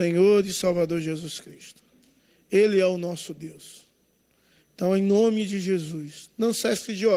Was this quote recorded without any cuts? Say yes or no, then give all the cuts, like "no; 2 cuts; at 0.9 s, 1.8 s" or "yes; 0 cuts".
yes; 0 cuts